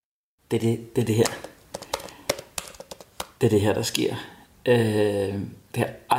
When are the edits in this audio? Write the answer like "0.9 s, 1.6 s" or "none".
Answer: none

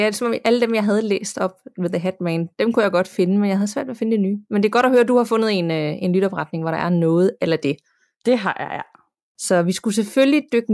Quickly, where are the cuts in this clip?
9.4 s

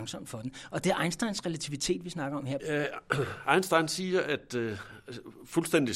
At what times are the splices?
2.6 s

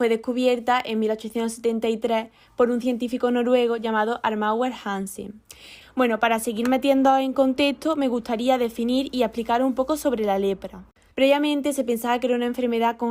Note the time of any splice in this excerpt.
5.8 s, 11.1 s

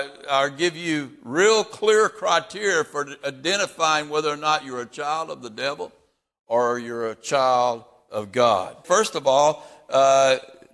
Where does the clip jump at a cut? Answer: 8.8 s

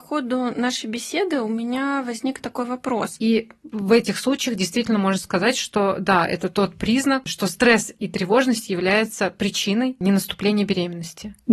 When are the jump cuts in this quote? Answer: 3.2 s

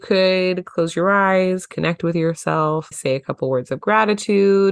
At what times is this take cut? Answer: 2.9 s

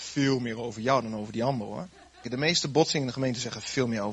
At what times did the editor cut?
2.2 s

